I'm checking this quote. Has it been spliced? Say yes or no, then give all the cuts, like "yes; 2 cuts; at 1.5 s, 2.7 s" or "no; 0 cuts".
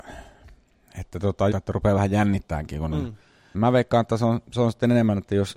yes; 2 cuts; at 1.5 s, 3.5 s